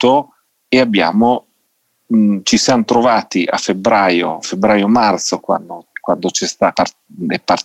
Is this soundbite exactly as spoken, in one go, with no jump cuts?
no; 1 cut; at 6.7 s

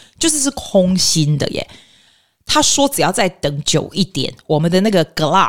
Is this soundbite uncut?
yes; 0 cuts

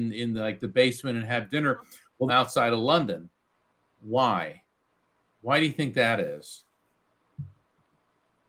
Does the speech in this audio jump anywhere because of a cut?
yes; 1 cut; at 2.3 s

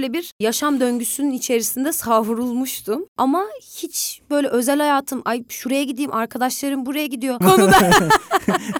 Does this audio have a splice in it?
yes; 1 cut; at 7.4 s

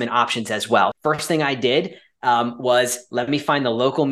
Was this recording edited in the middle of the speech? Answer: yes; 1 cut; at 0.9 s

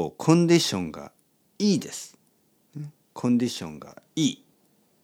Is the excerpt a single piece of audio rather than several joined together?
yes; 0 cuts

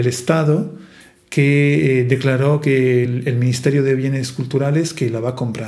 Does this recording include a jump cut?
no; 0 cuts

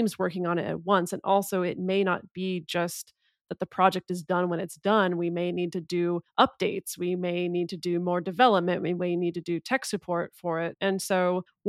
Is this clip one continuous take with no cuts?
no; 1 cut; at 10.7 s

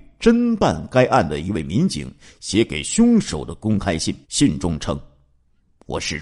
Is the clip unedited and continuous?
no; 1 cut; at 4.2 s

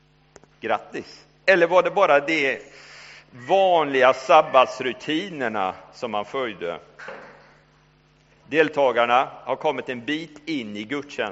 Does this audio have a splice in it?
yes; 1 cut; at 1.4 s

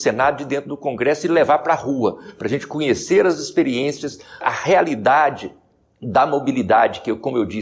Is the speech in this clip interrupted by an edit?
yes; 1 cut; at 4.4 s

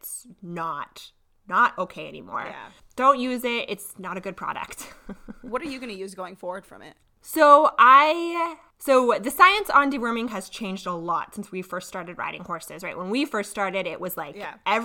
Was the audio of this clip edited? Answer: no; 0 cuts

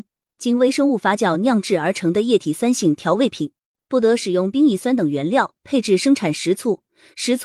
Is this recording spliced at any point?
yes; 1 cut; at 3.7 s

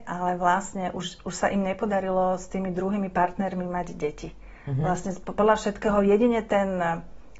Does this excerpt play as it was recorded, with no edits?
yes; 0 cuts

